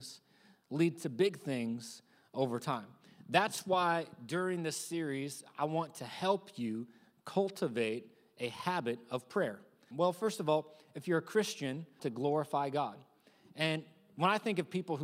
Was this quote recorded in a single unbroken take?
no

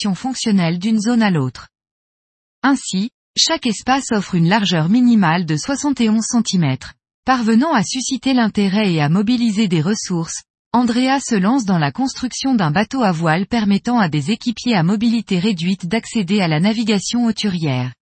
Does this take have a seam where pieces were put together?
yes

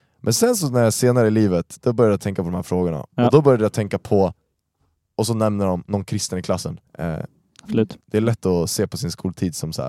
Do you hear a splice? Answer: yes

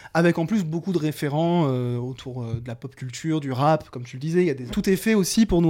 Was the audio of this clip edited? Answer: yes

